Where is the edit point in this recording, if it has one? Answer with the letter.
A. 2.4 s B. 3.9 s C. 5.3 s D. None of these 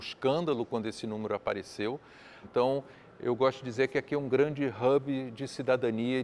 A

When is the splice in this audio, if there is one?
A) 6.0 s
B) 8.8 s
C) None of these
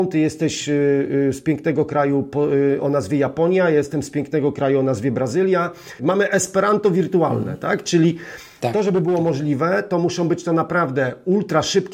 A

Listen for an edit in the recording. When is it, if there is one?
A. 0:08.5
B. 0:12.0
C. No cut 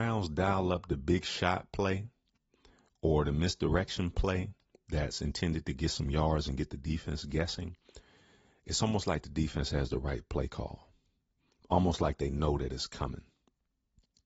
C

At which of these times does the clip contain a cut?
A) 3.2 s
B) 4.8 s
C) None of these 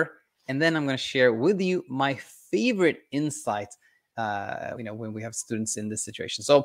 B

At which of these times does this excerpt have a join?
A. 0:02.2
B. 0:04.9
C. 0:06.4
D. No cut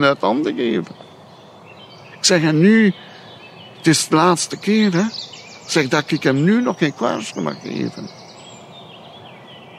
D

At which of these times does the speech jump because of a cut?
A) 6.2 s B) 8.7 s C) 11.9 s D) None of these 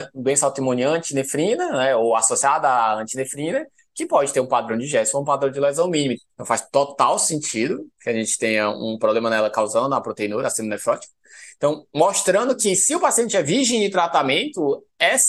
A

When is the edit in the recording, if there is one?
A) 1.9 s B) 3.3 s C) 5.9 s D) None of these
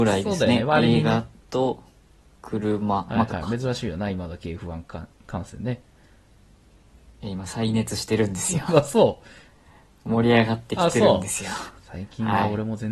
B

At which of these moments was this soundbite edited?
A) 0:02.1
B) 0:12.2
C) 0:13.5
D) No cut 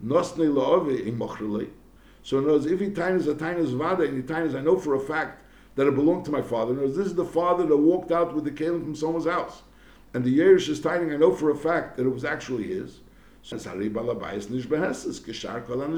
C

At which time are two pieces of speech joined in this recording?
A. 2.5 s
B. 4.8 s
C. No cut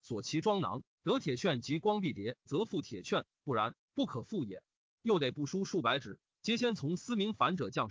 A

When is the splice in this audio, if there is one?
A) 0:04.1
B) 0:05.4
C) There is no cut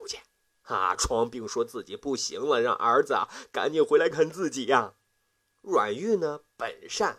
A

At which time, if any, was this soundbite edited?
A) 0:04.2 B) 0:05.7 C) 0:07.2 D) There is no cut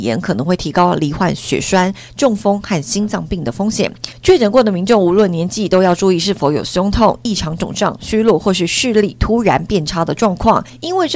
D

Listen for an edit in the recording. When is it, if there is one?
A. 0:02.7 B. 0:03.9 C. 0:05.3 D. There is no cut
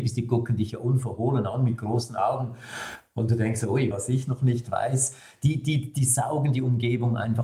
B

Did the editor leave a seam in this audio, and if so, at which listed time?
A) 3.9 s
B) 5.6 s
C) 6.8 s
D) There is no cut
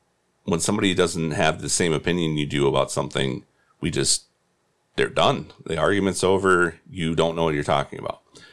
D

